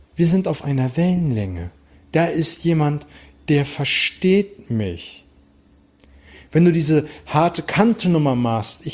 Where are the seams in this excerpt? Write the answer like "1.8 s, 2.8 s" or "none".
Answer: 1.9 s